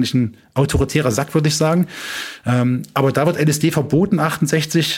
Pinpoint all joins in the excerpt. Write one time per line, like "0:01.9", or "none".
none